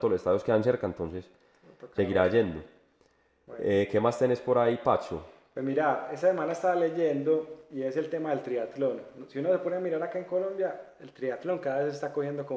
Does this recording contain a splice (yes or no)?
no